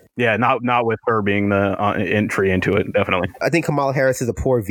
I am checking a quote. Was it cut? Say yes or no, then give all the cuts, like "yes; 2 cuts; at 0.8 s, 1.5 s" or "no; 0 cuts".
no; 0 cuts